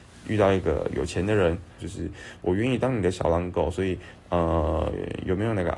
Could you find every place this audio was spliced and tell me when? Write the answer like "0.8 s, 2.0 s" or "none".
1.8 s